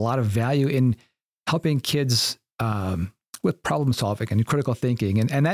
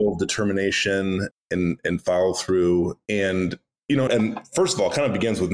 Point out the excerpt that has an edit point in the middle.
second; 3 cuts; at 1.3 s, 3.1 s, 4.1 s

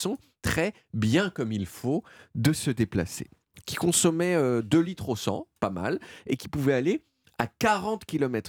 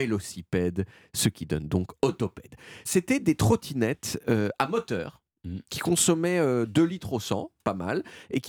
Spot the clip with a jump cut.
first; 1 cut; at 3.6 s

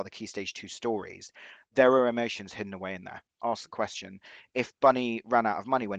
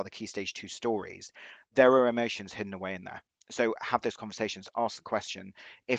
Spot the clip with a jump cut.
first; 1 cut; at 3.4 s

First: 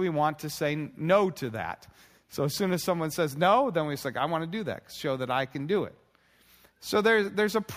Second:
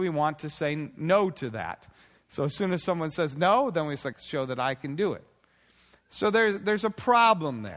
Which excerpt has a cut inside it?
second; 1 cut; at 4.1 s

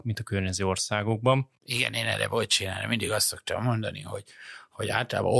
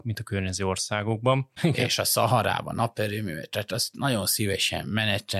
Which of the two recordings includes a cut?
second; 1 cut; at 1.6 s

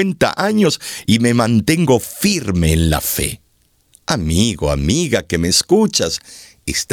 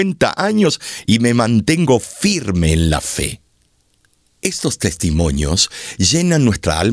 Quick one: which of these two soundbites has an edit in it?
first; 1 cut; at 3.9 s

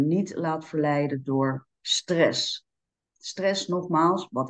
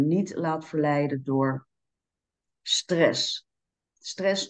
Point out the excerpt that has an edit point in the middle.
first; 1 cut; at 1.7 s

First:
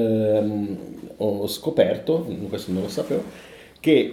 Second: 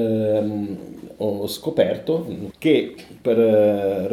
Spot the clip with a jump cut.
second; 1 cut; at 2.5 s

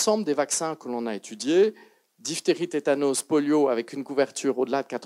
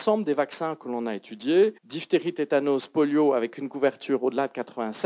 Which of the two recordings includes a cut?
second; 1 cut; at 1.8 s

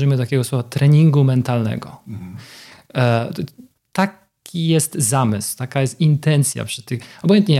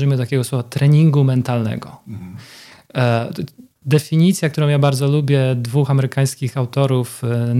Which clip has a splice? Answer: first; 1 cut; at 3.8 s

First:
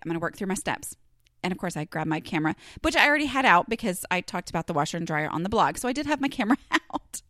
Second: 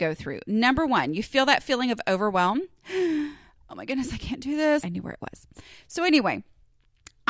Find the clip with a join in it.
second; 1 cut; at 4.8 s

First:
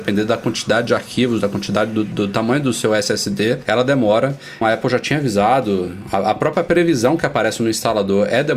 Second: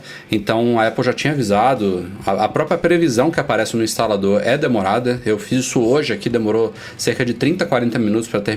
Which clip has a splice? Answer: first; 1 cut; at 4.6 s

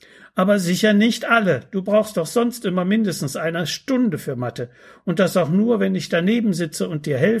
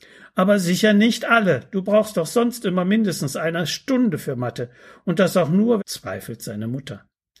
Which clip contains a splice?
second; 1 cut; at 5.8 s

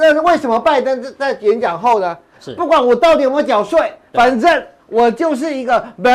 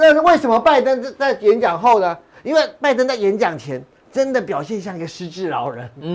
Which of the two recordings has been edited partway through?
first; 2 cuts; at 2.4 s, 4.1 s

